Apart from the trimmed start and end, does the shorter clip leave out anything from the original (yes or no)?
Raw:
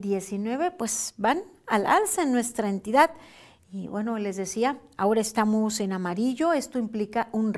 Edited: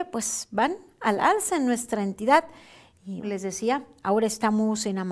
yes